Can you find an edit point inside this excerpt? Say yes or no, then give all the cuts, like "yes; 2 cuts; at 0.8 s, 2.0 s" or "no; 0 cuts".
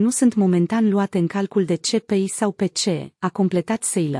no; 0 cuts